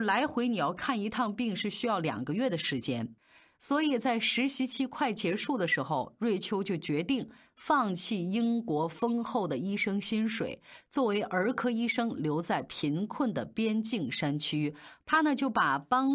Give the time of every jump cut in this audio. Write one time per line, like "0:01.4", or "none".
none